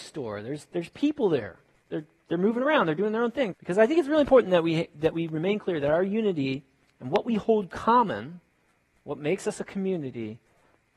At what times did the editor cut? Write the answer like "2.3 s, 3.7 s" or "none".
3.5 s